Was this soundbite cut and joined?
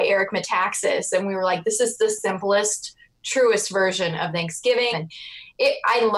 yes; 1 cut; at 4.9 s

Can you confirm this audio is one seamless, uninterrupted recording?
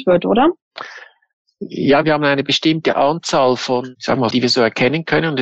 no; 1 cut; at 4.3 s

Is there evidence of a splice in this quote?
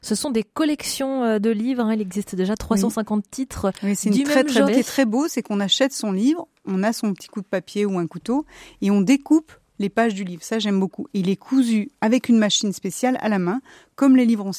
yes; 2 cuts; at 4.7 s, 12.0 s

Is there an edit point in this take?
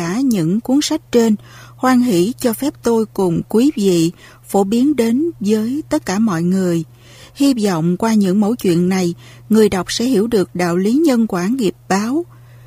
no; 0 cuts

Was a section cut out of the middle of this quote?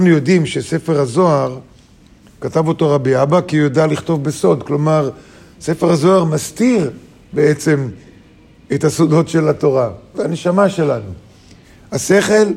yes; 1 cut; at 10.1 s

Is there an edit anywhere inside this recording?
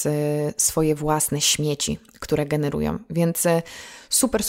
no; 0 cuts

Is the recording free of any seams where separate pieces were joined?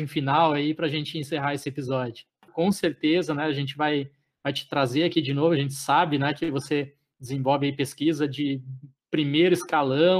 no; 1 cut; at 2.5 s

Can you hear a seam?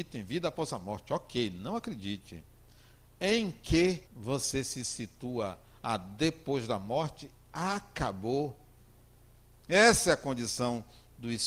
yes; 2 cuts; at 4.1 s, 9.6 s

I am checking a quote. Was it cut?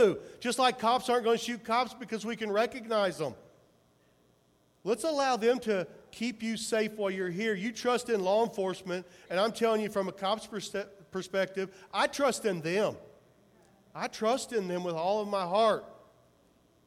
no; 0 cuts

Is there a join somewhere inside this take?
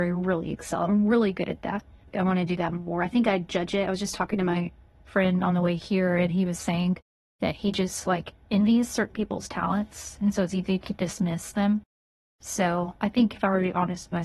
no; 0 cuts

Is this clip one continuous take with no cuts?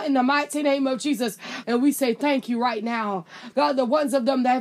no; 2 cuts; at 1.6 s, 3.5 s

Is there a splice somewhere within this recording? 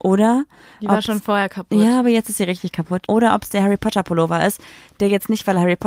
yes; 1 cut; at 3.1 s

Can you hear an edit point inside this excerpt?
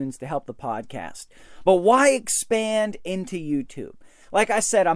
no; 0 cuts

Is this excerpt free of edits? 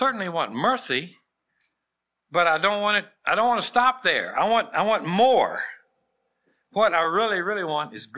yes; 0 cuts

